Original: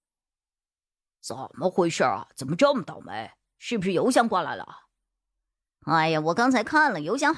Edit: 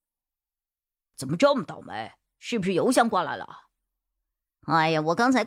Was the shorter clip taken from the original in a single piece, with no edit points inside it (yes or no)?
no